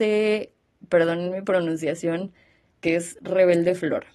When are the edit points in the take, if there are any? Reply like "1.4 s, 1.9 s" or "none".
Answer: 2.7 s